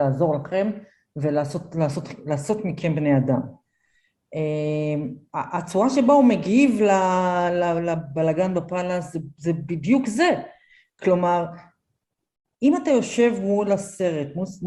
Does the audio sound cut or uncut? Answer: uncut